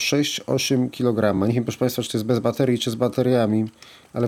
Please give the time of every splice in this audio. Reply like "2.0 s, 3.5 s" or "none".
none